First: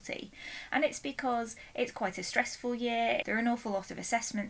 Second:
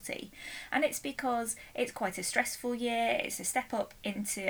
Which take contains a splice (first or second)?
first